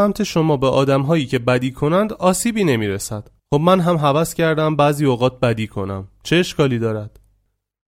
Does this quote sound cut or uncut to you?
cut